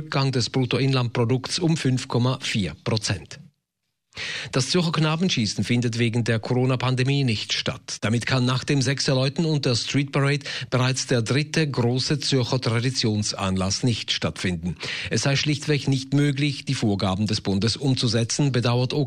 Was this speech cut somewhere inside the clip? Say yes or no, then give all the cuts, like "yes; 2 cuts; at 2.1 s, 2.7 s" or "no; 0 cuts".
no; 0 cuts